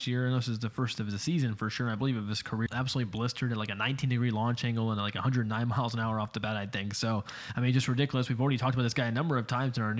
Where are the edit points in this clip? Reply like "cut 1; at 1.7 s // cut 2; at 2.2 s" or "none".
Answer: cut 1; at 2.7 s